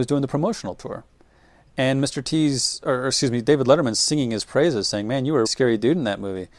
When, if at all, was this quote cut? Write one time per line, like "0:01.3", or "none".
0:05.4

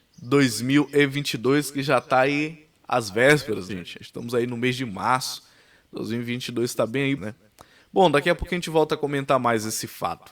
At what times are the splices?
0:03.7
0:07.2

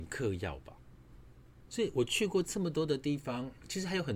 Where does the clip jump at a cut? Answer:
0:01.7

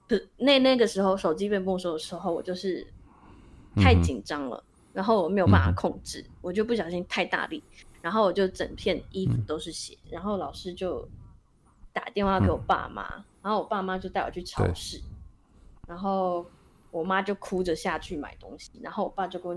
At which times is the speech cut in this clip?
0:10.0

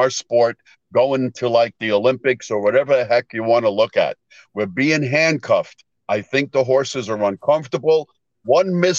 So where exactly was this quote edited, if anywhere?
none

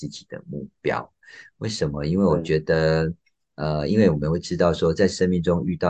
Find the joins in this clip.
none

